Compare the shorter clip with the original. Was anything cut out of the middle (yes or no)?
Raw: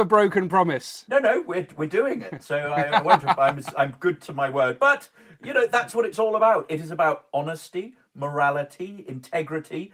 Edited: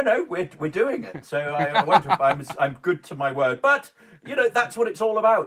no